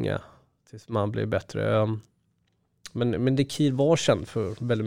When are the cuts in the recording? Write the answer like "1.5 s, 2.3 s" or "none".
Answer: none